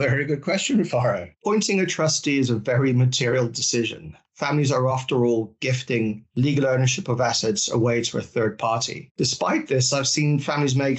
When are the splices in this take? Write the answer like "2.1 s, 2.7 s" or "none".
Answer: none

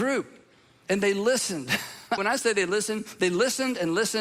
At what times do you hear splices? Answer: 2.2 s

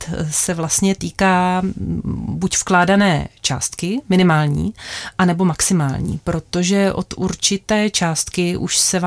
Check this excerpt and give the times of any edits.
none

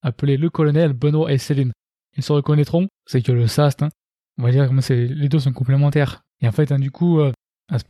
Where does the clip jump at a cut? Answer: 3.0 s, 6.2 s

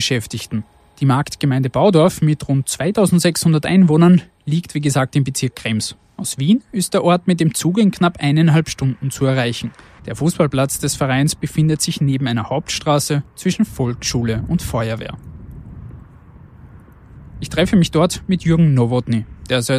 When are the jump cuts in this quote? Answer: 10.0 s

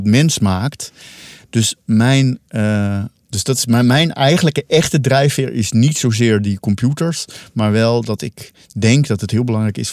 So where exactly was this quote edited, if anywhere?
none

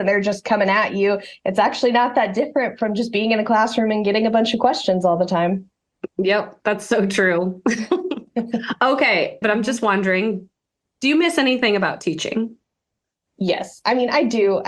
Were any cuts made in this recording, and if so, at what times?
9.4 s

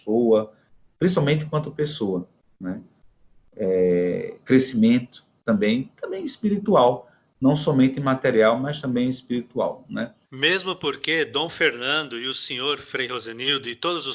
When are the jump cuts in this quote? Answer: 10.2 s

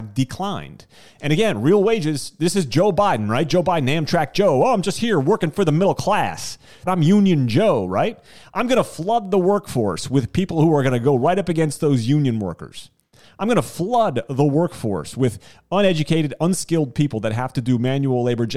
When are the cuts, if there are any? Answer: 6.9 s

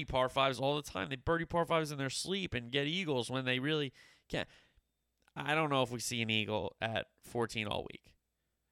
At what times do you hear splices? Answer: none

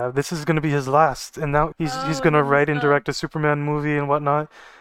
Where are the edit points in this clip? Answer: 1.7 s

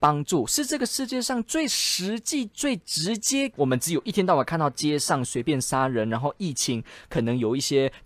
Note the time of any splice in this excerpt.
3.5 s

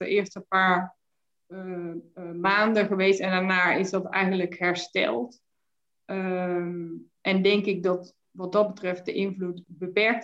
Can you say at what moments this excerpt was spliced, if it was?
none

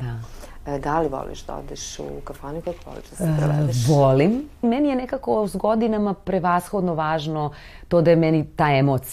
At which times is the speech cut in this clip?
4.6 s

